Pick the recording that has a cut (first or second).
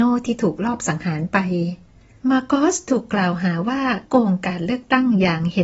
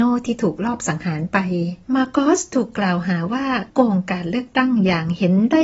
second